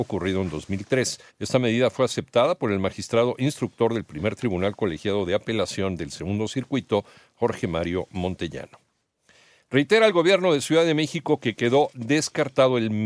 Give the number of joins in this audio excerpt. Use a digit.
1